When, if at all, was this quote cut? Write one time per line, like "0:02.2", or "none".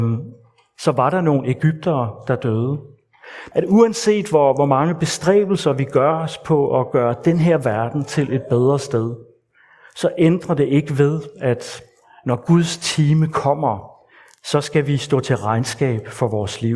0:03.5